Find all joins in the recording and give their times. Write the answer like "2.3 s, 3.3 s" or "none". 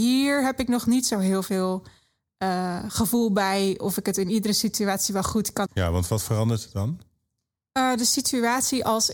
5.7 s